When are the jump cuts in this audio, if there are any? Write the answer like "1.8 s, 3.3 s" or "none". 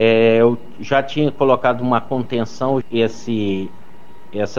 2.8 s

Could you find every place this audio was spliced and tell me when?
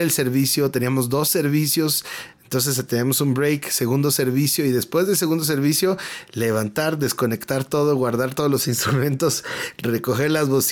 none

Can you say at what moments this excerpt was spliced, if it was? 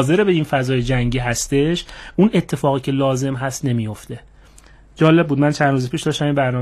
none

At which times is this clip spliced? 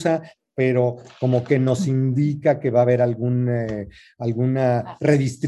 none

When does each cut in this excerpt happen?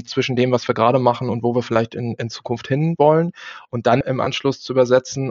4.0 s

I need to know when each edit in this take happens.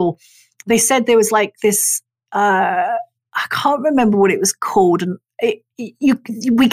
none

